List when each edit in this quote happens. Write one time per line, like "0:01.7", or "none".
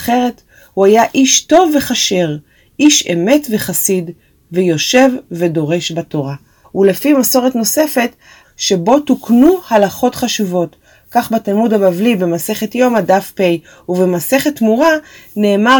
0:06.6
0:08.4